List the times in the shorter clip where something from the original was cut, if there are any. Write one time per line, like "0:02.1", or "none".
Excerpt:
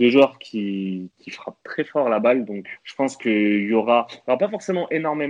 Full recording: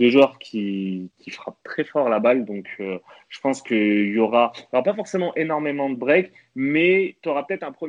0:02.8